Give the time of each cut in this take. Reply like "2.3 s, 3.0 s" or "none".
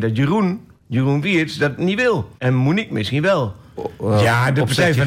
2.4 s, 3.7 s